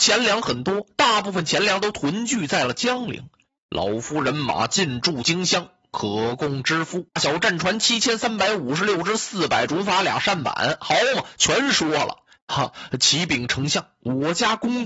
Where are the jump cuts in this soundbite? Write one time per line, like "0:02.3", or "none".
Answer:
0:07.2
0:12.4